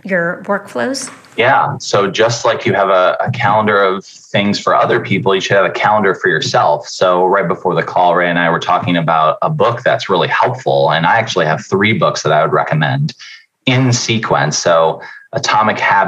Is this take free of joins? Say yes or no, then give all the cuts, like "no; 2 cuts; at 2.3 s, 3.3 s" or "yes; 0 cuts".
yes; 0 cuts